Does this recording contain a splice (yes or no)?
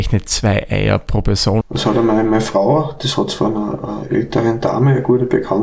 yes